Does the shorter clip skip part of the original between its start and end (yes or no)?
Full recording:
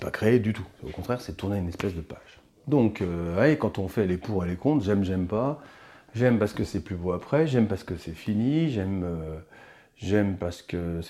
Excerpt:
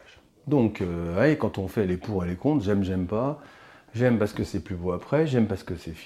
no